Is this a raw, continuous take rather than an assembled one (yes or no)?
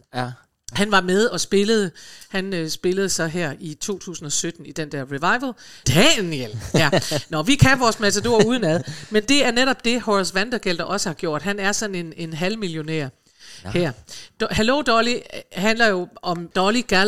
no